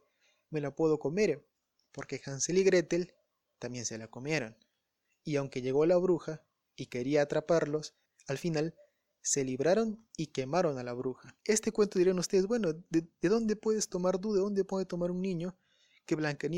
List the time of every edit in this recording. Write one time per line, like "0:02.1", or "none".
0:11.4